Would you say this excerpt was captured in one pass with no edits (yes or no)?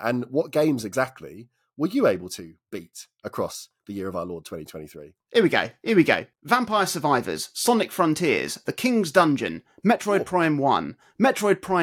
no